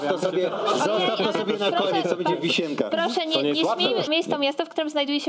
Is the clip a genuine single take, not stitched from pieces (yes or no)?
no